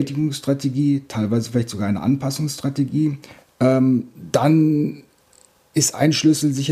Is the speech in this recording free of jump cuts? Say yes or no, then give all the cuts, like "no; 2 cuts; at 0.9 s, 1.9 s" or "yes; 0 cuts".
no; 1 cut; at 3.4 s